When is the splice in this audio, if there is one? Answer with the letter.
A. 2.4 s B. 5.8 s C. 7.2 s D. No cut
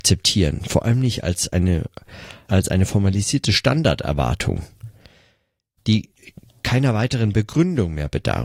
A